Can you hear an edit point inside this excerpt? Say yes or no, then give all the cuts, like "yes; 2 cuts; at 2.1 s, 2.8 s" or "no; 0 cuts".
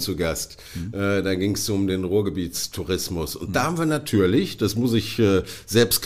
no; 0 cuts